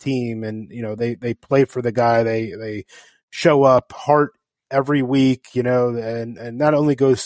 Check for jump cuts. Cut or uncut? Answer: uncut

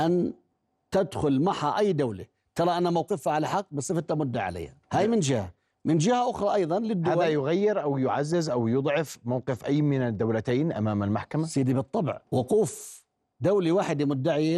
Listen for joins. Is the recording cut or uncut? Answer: cut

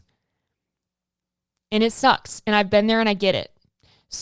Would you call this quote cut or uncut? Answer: uncut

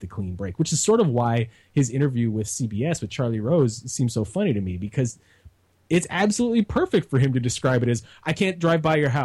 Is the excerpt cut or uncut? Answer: uncut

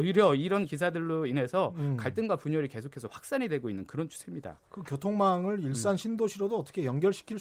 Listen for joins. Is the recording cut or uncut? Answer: uncut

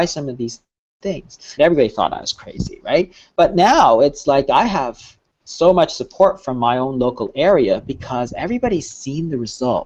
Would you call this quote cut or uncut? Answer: cut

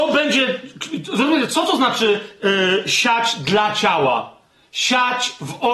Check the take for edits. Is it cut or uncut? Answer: uncut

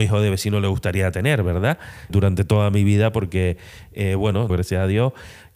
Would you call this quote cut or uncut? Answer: cut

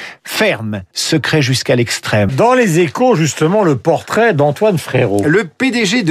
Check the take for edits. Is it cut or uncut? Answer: cut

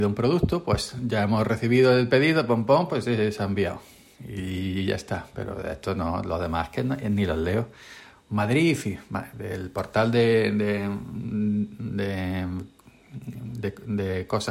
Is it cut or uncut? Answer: uncut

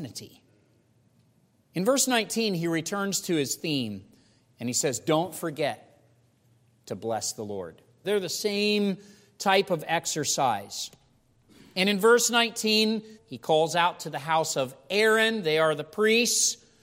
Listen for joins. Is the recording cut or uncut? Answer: cut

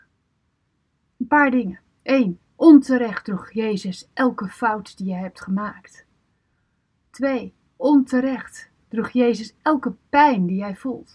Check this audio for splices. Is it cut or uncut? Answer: uncut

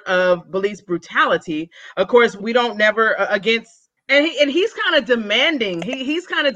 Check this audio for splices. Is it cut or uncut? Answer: cut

